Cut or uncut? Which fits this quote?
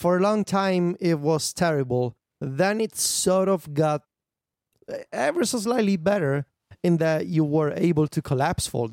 uncut